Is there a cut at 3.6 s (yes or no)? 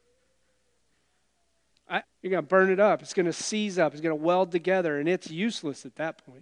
no